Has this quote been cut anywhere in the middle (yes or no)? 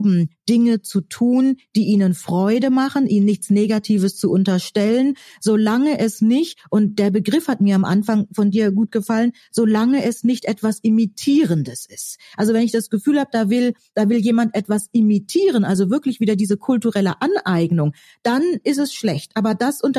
no